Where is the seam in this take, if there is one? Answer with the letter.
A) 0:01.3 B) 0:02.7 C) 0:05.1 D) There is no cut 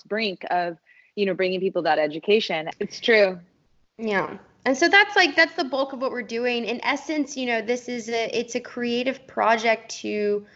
B